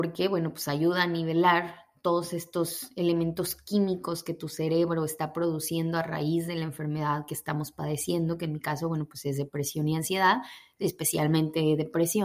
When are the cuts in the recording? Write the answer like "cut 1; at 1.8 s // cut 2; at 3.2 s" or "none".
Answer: none